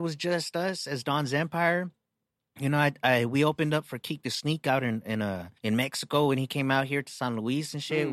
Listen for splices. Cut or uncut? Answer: cut